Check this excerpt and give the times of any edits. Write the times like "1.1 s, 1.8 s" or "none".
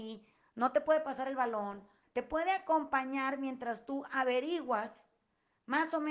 2.0 s